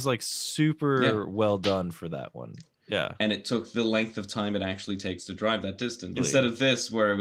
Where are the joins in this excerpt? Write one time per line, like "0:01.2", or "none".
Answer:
0:02.8
0:06.1